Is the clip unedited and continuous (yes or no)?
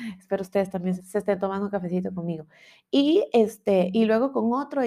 no